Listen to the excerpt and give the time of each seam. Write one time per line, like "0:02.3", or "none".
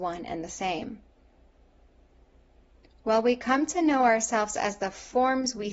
none